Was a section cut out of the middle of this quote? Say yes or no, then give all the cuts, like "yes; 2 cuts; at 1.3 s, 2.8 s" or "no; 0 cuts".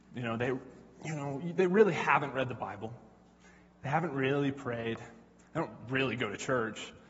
no; 0 cuts